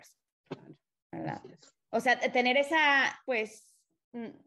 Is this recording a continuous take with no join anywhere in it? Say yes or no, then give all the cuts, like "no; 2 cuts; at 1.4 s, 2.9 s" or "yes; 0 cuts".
no; 1 cut; at 3.2 s